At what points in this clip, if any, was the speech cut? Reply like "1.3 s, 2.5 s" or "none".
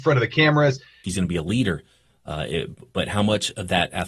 1.0 s